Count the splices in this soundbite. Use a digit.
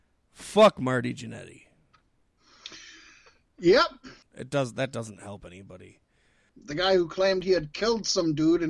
2